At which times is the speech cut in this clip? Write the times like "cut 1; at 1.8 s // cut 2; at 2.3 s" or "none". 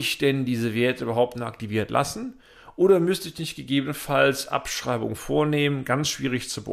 none